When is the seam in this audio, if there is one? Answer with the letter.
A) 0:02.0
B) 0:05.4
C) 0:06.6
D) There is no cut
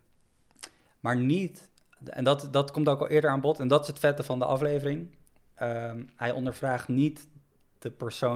A